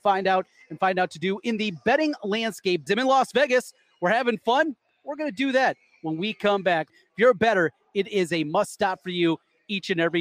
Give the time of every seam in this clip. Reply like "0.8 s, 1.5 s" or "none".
2.9 s, 6.9 s